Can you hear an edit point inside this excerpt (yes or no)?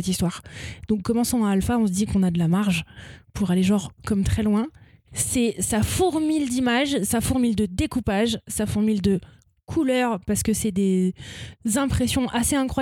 yes